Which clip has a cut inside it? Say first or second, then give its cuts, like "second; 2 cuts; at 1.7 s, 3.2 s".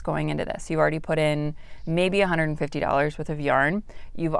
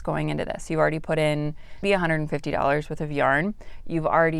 second; 1 cut; at 1.8 s